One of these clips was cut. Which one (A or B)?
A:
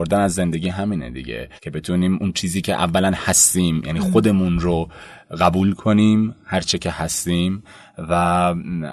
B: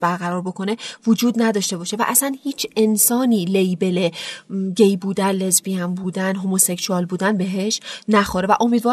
A